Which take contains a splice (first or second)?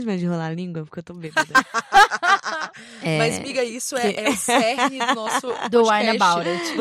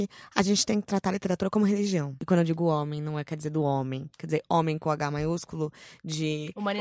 second